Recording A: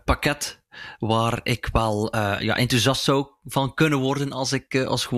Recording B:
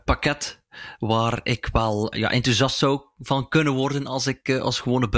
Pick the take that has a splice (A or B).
B